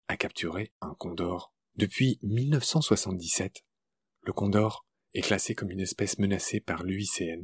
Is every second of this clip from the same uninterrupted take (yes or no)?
no